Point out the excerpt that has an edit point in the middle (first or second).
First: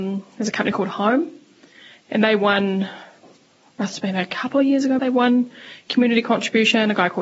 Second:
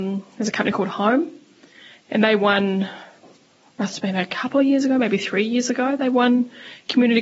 first